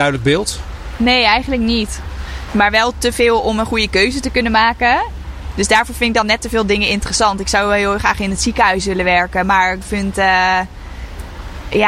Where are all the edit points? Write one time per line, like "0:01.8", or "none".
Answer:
0:02.5